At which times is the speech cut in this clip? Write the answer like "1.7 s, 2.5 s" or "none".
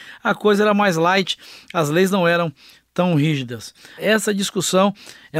4.0 s

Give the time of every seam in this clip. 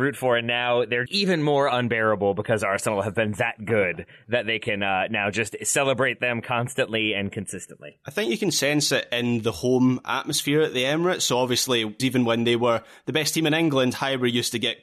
1.1 s, 12.0 s

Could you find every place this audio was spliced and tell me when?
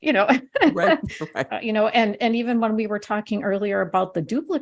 1.5 s

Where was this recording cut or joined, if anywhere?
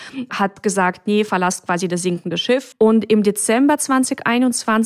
2.7 s

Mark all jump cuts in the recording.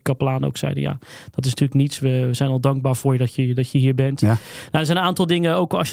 none

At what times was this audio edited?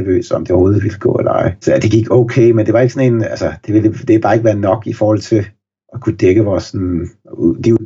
none

